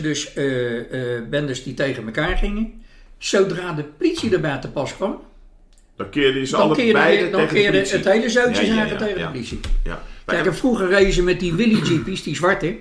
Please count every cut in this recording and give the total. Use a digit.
0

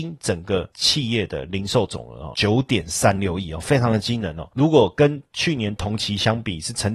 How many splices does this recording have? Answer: 1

